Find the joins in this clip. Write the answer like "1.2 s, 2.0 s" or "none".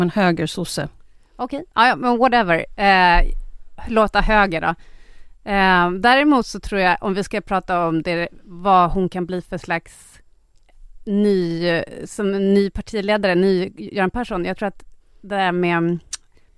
none